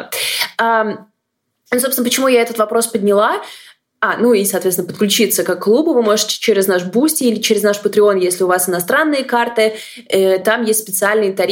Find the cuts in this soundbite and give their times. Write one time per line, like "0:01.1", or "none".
none